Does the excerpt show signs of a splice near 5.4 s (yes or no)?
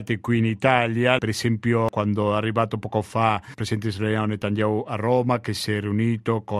no